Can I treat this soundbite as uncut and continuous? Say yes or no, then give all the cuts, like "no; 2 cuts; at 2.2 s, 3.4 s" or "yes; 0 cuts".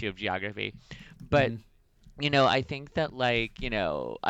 yes; 0 cuts